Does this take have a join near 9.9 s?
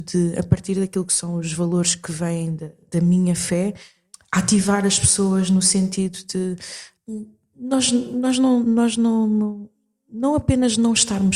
no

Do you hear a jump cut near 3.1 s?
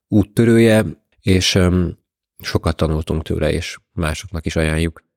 no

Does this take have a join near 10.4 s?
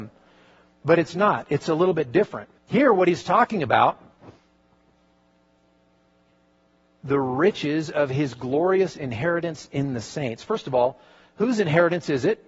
no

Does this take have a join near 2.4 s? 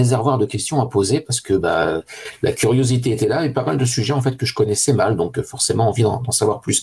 no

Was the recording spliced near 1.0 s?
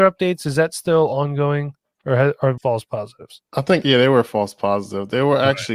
no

